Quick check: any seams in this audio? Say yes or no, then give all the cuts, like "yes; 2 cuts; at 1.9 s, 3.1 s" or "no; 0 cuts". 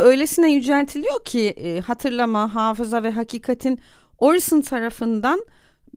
no; 0 cuts